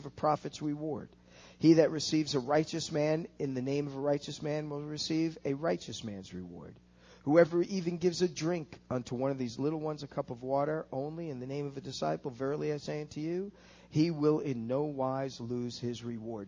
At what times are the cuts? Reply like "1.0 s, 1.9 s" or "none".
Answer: none